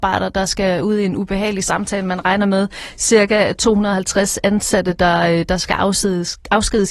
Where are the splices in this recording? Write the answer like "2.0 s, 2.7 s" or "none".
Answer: none